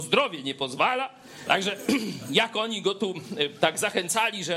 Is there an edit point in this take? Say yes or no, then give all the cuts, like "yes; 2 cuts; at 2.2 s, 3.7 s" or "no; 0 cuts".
yes; 1 cut; at 1.4 s